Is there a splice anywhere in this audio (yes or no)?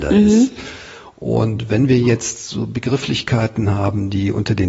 no